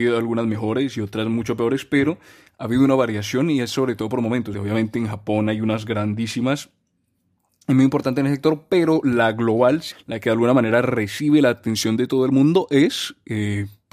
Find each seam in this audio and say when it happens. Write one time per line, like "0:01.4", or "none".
0:04.5
0:09.9